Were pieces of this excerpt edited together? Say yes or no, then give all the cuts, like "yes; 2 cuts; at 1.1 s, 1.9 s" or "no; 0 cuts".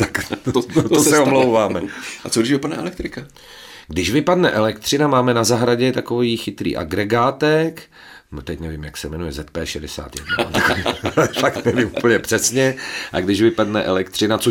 no; 0 cuts